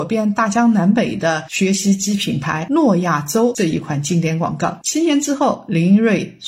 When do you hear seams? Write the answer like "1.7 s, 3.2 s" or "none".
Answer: none